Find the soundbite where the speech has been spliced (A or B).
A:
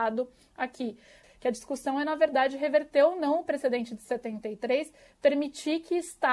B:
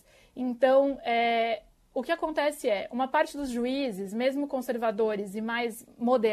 A